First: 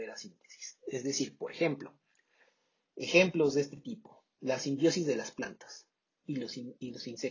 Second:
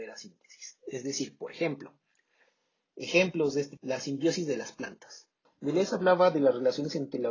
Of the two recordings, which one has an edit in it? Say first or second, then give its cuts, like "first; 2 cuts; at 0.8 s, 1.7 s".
second; 2 cuts; at 3.8 s, 5.5 s